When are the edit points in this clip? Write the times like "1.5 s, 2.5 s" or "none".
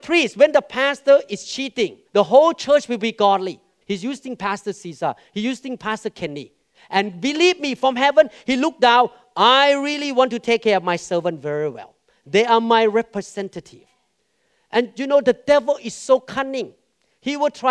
2.0 s, 3.8 s, 6.7 s